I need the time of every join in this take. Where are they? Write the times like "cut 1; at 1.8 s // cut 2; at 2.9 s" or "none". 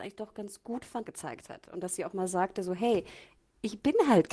cut 1; at 1.0 s